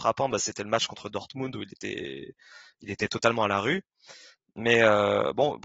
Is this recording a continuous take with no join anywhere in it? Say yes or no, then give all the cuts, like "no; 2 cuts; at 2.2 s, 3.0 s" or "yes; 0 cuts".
yes; 0 cuts